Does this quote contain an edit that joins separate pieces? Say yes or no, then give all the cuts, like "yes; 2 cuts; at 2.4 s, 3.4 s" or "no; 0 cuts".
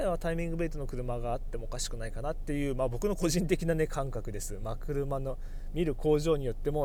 no; 0 cuts